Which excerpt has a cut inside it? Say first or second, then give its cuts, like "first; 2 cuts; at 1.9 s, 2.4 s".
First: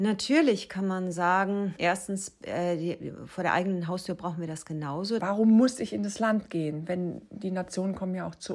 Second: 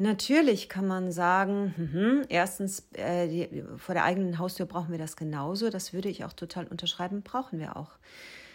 first; 2 cuts; at 1.8 s, 5.2 s